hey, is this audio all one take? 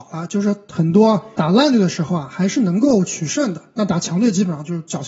yes; 0 cuts

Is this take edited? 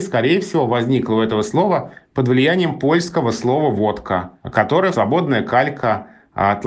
yes; 1 cut; at 4.9 s

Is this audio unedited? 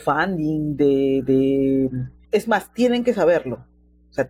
no; 1 cut; at 2.2 s

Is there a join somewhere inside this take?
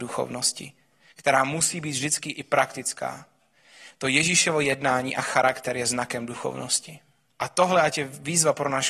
no; 0 cuts

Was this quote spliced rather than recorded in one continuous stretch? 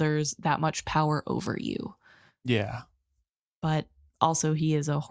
no; 0 cuts

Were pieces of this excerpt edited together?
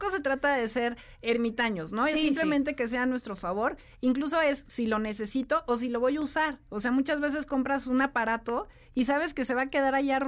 no; 0 cuts

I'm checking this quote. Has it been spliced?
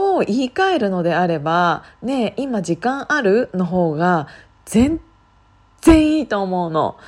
no; 0 cuts

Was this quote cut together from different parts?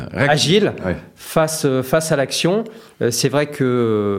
no; 0 cuts

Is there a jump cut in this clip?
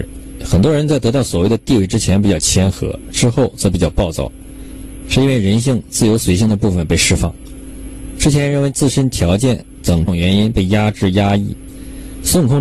yes; 1 cut; at 10.1 s

